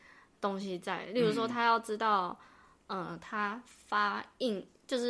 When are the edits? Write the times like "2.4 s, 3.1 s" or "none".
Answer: none